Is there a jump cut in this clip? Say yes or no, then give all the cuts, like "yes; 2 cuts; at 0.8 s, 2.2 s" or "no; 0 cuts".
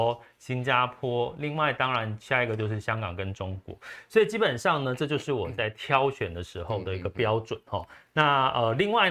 no; 0 cuts